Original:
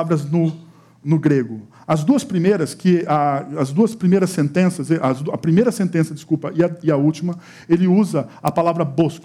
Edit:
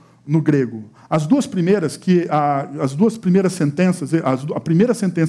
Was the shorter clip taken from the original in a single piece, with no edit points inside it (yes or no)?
yes